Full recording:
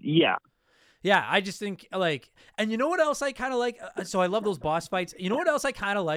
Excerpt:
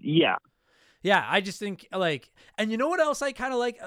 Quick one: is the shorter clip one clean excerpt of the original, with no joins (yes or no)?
yes